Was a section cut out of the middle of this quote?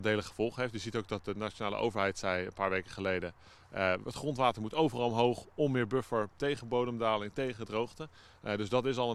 no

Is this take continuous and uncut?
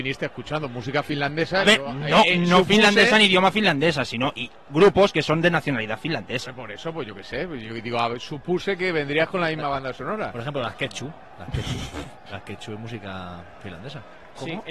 yes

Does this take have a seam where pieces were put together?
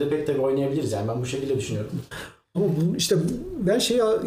yes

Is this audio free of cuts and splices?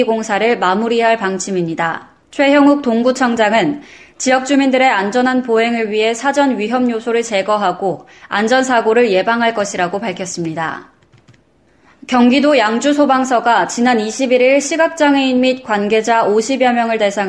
yes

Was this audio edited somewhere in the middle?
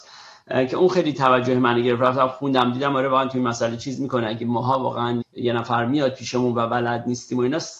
yes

